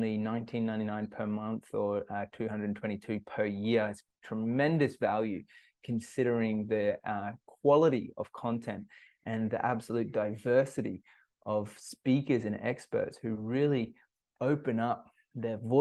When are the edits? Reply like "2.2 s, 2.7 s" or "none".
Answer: none